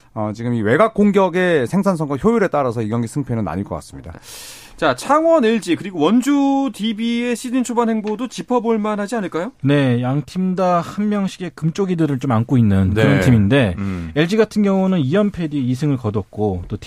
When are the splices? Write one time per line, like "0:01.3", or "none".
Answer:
0:04.1